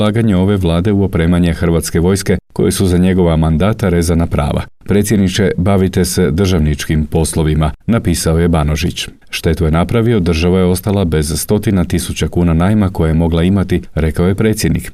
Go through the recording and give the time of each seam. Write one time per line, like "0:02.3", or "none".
0:07.8
0:09.2